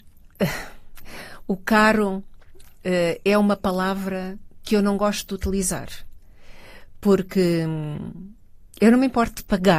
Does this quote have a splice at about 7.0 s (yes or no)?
no